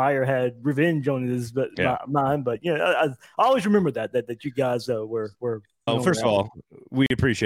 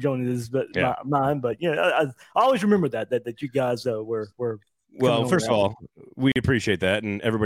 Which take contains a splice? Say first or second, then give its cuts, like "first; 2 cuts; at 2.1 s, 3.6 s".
first; 1 cut; at 5.9 s